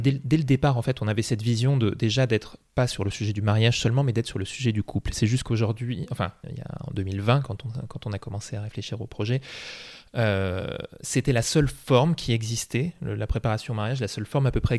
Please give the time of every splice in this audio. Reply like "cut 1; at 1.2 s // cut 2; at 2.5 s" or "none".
cut 1; at 6.4 s